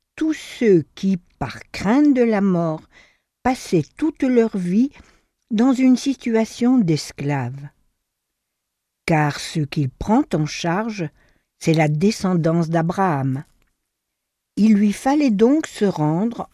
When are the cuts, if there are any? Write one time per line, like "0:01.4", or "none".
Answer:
0:11.4